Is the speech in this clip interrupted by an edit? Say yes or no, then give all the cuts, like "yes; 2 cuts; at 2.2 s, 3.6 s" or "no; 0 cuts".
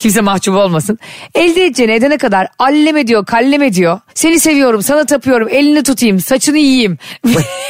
yes; 1 cut; at 4.1 s